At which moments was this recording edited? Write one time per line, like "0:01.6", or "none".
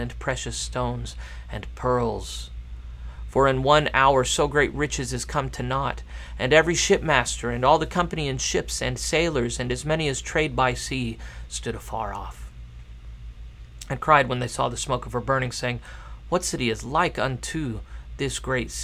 none